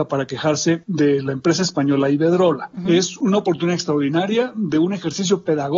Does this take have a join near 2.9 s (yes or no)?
yes